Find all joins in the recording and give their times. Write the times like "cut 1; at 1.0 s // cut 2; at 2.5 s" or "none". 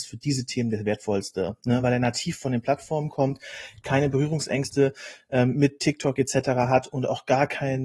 none